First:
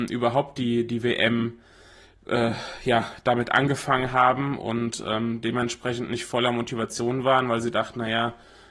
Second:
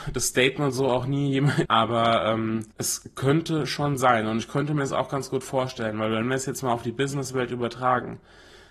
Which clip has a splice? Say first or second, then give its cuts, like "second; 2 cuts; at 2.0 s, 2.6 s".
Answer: second; 2 cuts; at 1.7 s, 2.7 s